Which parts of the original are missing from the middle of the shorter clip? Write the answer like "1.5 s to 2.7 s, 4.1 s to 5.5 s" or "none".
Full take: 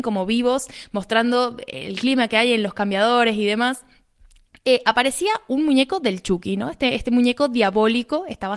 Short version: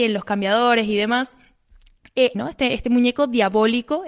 4.8 s to 6.6 s